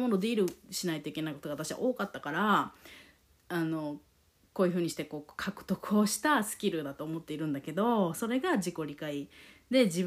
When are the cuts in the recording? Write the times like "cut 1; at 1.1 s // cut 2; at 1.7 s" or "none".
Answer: none